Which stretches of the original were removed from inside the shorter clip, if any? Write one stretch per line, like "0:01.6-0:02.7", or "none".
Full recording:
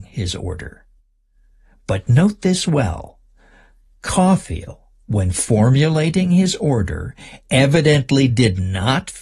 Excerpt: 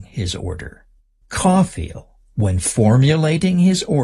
0:01.2-0:03.9

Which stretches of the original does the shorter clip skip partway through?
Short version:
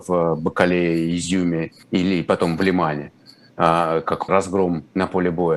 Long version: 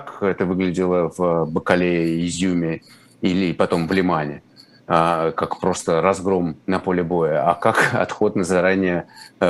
0:02.9-0:03.1
0:05.6-0:06.0

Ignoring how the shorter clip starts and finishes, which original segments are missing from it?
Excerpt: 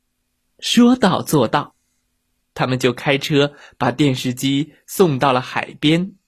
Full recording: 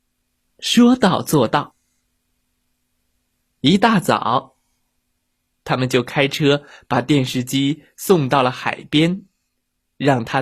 0:02.4-0:05.5

